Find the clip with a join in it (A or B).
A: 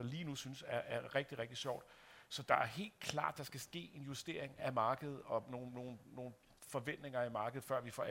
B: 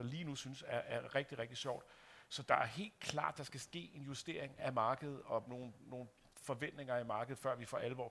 B